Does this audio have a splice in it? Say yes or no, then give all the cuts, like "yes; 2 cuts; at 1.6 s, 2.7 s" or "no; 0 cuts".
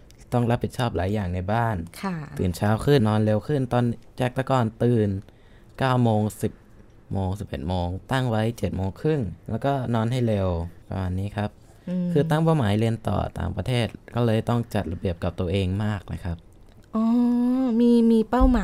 yes; 3 cuts; at 3.0 s, 9.4 s, 10.8 s